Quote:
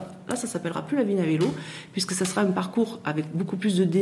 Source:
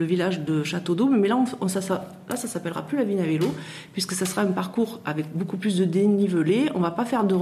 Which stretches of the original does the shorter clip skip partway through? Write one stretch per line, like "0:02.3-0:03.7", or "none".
none